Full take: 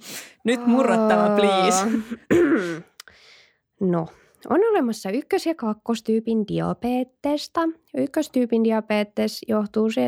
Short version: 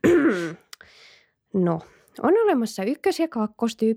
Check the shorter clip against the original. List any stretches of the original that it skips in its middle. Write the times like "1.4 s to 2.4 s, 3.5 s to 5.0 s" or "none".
none